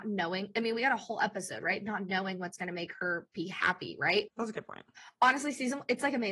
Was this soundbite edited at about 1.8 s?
no; 1 cut; at 4.3 s

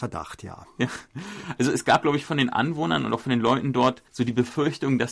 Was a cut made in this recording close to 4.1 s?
yes; 1 cut; at 4.1 s

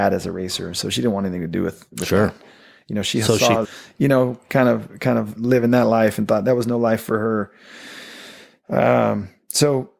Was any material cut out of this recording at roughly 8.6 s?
no; 1 cut; at 3.6 s

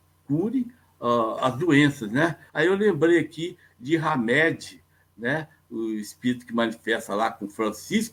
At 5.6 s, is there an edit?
no; 1 cut; at 2.5 s

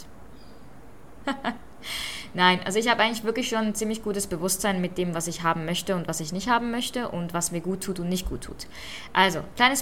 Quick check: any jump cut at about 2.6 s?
no; 1 cut; at 1.2 s

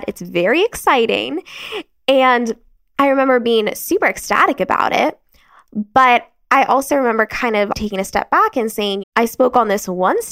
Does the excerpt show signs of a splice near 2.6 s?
no; 2 cuts; at 7.7 s, 9.0 s

